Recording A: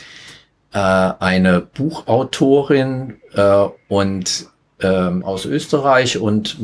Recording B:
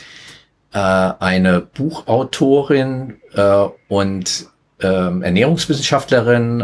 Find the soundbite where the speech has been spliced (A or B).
A